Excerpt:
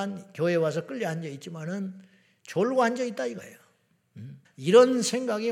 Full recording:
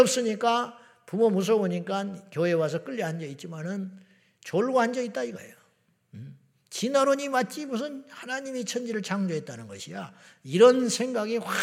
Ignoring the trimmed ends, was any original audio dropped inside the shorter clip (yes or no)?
yes